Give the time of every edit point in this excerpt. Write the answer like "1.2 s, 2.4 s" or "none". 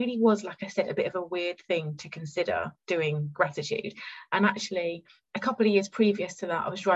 none

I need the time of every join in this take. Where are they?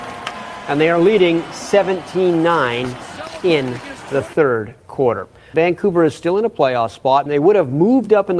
5.5 s, 7.3 s

